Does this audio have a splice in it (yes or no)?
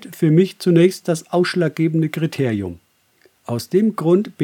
no